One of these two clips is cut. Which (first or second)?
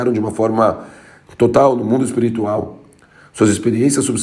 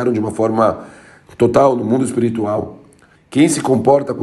second